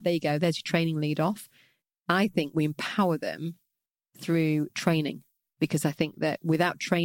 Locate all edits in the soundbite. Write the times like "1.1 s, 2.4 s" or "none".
2.0 s